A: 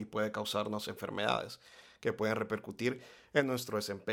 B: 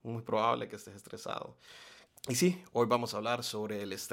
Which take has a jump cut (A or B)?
B